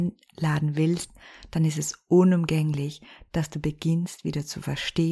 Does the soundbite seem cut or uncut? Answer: uncut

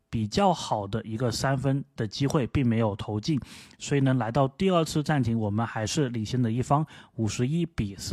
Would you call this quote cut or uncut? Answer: uncut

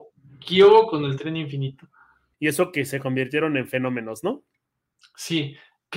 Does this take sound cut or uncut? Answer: cut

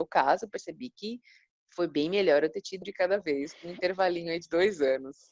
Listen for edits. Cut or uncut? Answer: cut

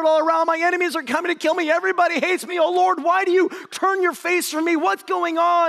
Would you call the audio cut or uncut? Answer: uncut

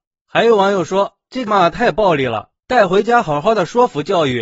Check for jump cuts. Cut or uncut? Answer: cut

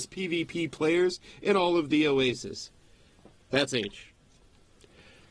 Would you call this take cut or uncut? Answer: uncut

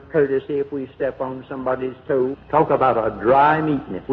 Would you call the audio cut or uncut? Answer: cut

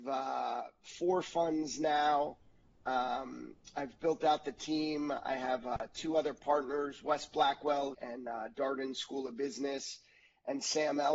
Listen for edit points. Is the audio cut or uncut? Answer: cut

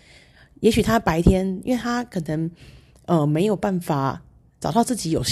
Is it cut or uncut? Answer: uncut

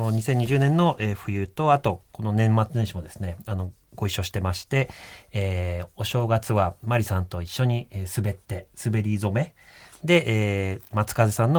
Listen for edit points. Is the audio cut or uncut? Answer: uncut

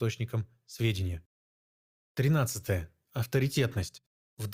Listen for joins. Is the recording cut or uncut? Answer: uncut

